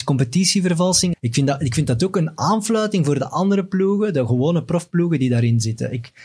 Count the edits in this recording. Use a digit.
1